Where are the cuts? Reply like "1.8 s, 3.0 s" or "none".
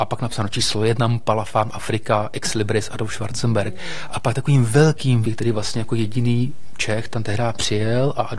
4.1 s, 5.2 s